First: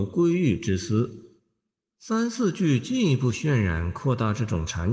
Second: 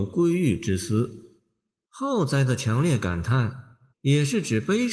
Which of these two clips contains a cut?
second; 2 cuts; at 1.8 s, 3.9 s

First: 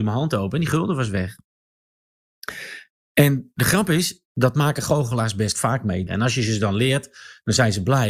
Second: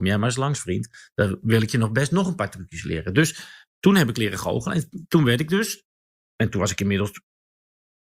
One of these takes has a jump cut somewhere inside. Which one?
first; 1 cut; at 6.1 s

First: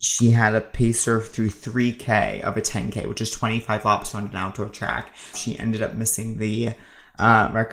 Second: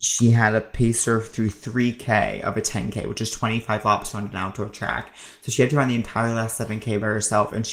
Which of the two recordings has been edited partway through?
first; 1 cut; at 5.3 s

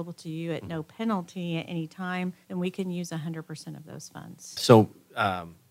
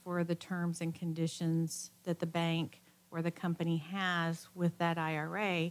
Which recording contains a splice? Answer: first; 2 cuts; at 2.4 s, 4.6 s

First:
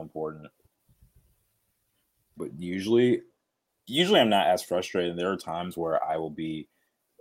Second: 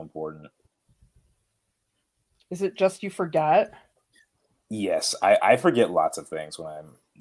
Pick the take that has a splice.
first; 1 cut; at 2.4 s

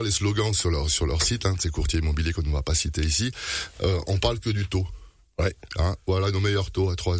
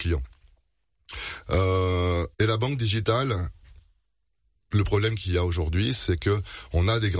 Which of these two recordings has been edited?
second; 1 cut; at 2.3 s

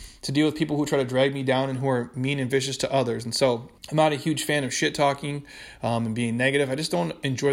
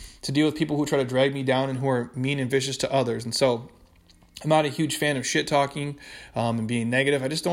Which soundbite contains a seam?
first; 1 cut; at 3.8 s

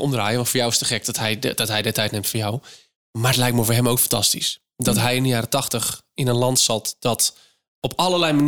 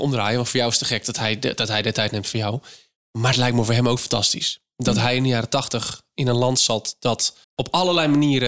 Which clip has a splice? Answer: second; 1 cut; at 7.4 s

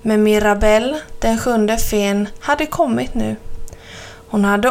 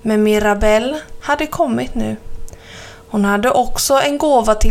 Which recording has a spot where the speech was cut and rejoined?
second; 1 cut; at 1.2 s

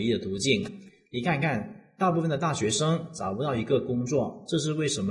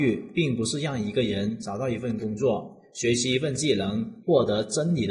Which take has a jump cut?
second; 1 cut; at 4.2 s

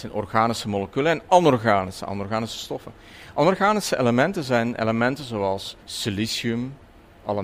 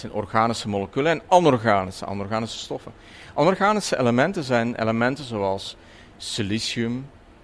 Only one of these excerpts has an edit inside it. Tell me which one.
first; 1 cut; at 5.8 s

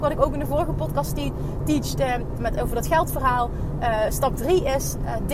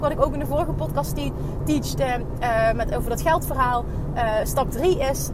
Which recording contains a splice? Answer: first; 1 cut; at 2.4 s

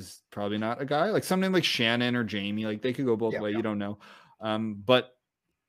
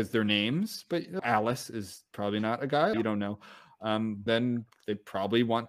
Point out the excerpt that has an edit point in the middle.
second; 3 cuts; at 1.2 s, 2.9 s, 4.3 s

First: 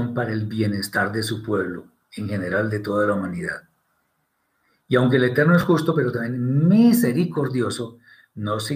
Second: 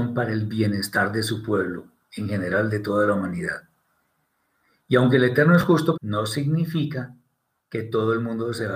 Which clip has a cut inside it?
second; 1 cut; at 5.9 s

